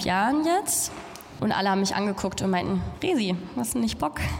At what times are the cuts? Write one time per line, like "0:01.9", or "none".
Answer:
0:01.4